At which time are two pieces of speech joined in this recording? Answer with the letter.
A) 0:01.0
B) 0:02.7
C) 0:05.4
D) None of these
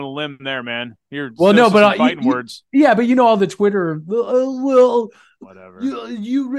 C